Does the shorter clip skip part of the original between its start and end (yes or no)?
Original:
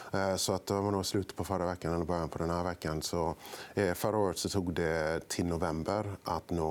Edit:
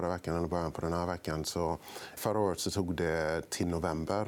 yes